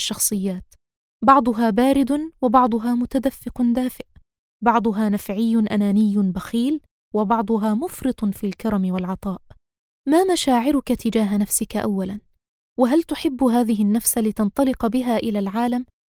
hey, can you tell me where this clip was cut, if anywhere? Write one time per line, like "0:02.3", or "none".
none